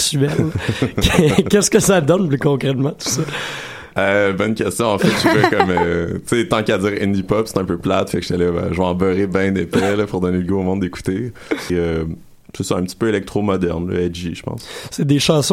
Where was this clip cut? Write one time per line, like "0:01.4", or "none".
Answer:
0:11.7